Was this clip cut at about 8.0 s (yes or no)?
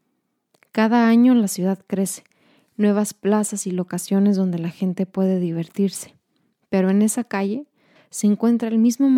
yes